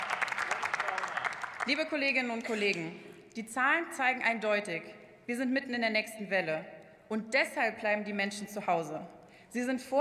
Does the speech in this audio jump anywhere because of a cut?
no; 0 cuts

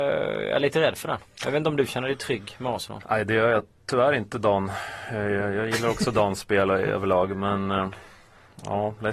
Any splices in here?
no; 0 cuts

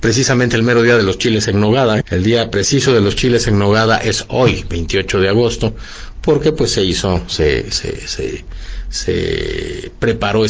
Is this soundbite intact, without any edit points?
no; 1 cut; at 2.0 s

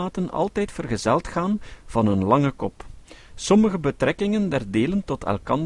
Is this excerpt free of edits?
yes; 0 cuts

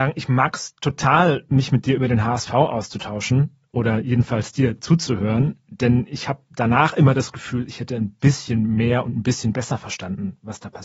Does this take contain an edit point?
no; 0 cuts

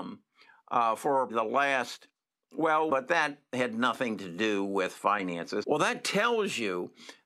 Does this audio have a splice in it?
yes; 3 cuts; at 1.3 s, 2.9 s, 5.6 s

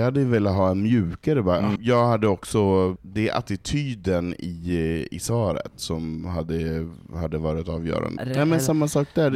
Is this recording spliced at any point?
yes; 3 cuts; at 1.8 s, 3.0 s, 8.2 s

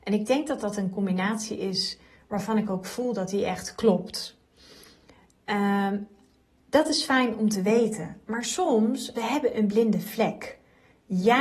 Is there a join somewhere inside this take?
yes; 1 cut; at 9.1 s

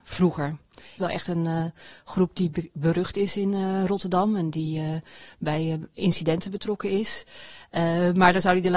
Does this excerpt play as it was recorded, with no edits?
no; 1 cut; at 1.0 s

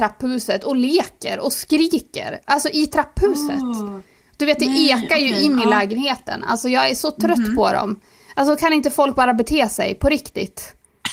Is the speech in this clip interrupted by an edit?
no; 0 cuts

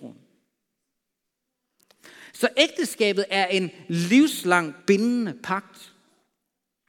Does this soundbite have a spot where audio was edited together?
no; 0 cuts

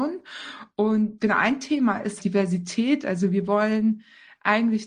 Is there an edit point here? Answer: yes; 1 cut; at 2.2 s

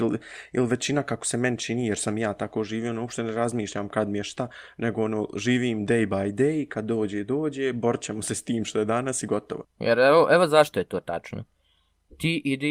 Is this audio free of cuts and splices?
no; 1 cut; at 9.6 s

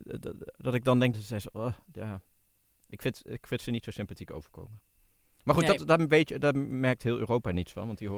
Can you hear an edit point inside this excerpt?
yes; 1 cut; at 1.1 s

